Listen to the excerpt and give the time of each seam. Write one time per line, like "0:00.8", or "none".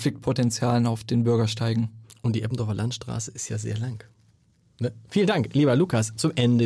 none